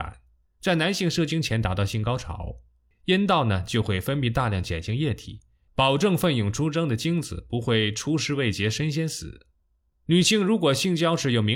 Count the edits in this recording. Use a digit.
2